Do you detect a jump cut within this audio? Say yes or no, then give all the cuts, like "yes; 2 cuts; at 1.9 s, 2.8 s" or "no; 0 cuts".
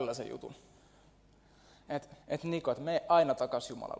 yes; 1 cut; at 2.2 s